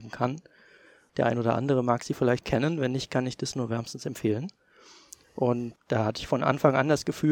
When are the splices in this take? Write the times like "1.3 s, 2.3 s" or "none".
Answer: 1.1 s, 2.4 s, 5.8 s